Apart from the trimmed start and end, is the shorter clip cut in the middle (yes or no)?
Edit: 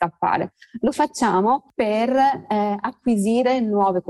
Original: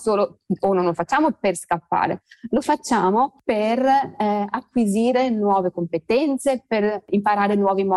no